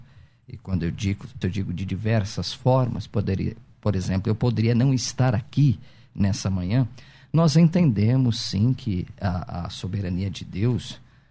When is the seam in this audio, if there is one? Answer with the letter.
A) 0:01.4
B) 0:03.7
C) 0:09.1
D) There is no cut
A